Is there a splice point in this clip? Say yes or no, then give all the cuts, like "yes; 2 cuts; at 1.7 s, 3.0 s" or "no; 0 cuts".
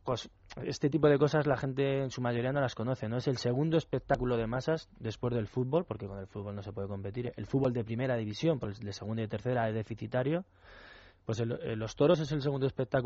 no; 0 cuts